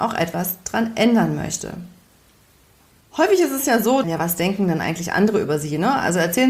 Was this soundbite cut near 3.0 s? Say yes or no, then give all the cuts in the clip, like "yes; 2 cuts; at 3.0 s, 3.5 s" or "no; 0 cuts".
yes; 2 cuts; at 3.0 s, 4.0 s